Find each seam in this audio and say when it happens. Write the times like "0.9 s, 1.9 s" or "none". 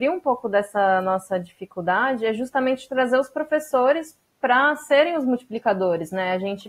none